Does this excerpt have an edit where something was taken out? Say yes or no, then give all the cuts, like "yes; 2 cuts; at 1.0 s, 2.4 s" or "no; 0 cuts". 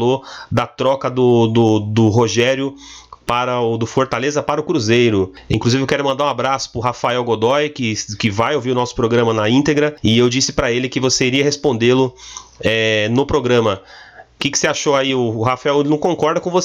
no; 0 cuts